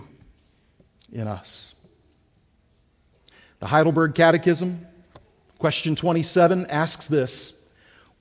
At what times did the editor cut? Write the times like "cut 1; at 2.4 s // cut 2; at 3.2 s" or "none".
none

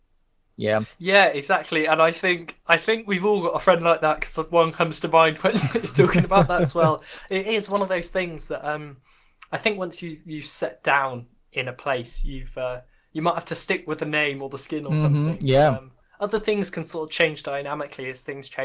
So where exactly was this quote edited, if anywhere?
none

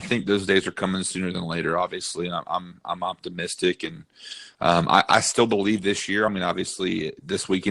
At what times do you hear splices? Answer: none

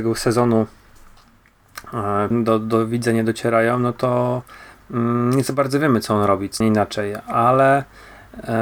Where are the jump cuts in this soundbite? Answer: cut 1; at 2.3 s // cut 2; at 6.6 s

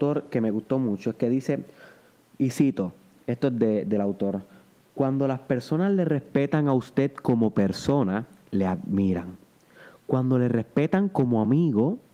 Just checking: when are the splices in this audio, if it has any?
none

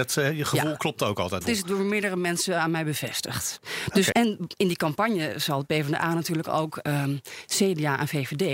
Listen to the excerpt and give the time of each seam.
cut 1; at 1.4 s // cut 2; at 4.1 s

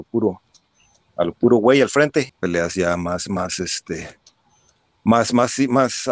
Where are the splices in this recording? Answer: cut 1; at 2.3 s

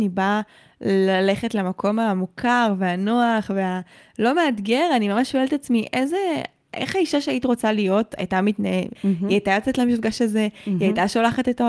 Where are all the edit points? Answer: cut 1; at 9.0 s

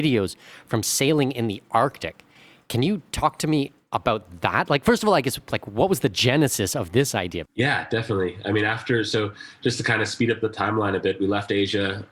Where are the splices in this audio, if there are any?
cut 1; at 7.5 s

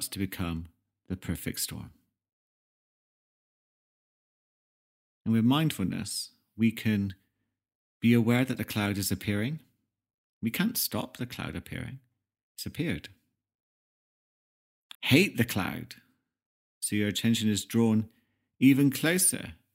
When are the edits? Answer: cut 1; at 14.9 s // cut 2; at 16.6 s

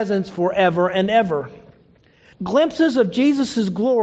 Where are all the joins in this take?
cut 1; at 2.3 s

